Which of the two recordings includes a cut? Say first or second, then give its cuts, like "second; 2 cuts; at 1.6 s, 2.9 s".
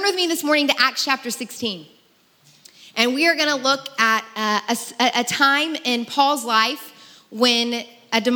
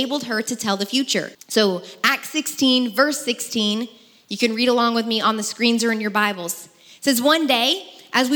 second; 1 cut; at 1.3 s